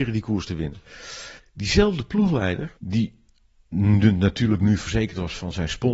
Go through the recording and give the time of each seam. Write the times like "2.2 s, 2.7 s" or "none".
1.4 s, 2.8 s